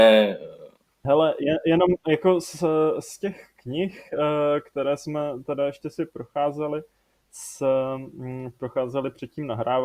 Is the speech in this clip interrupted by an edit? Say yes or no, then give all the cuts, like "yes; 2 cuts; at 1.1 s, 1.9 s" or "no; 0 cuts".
no; 0 cuts